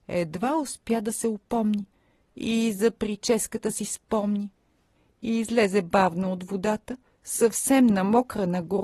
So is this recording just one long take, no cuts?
yes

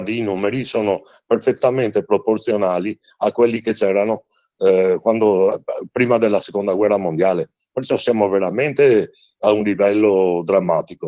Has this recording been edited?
no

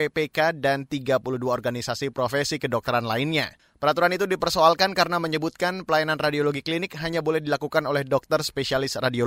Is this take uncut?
yes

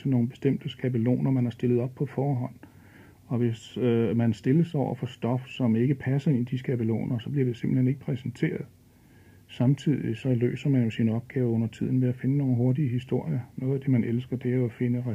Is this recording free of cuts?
yes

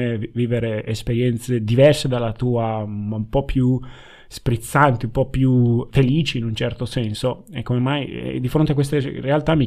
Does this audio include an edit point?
yes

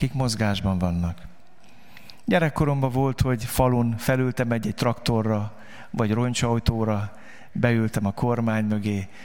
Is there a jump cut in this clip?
no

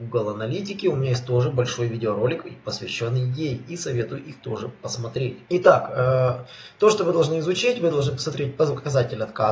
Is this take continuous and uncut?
no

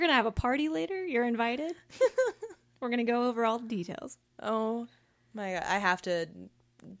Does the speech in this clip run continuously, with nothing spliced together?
yes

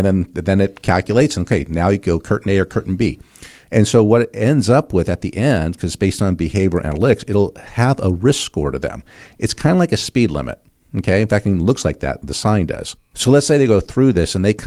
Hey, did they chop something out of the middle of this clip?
no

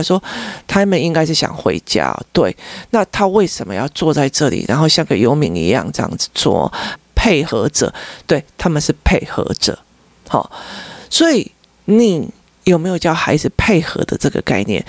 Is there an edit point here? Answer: yes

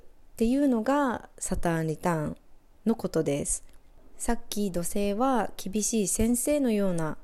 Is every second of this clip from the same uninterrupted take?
yes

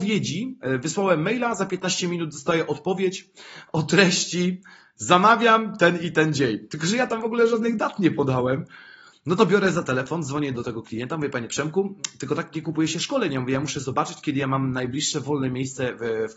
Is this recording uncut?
no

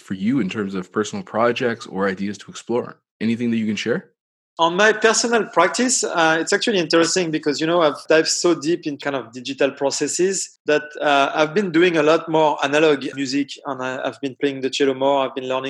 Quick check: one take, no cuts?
yes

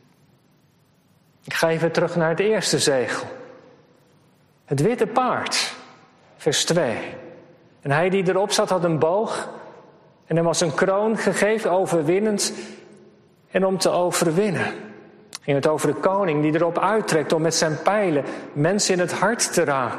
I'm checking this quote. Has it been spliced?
yes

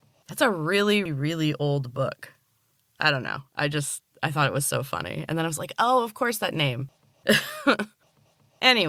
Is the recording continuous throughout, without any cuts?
no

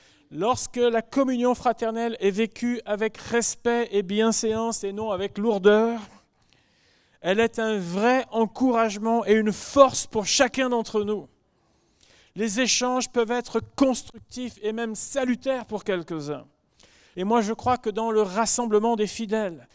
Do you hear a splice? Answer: yes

